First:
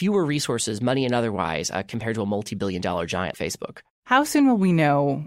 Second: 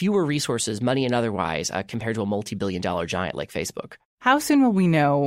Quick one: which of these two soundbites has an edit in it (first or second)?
first